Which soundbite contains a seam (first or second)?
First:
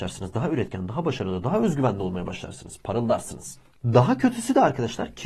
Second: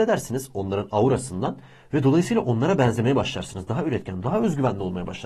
second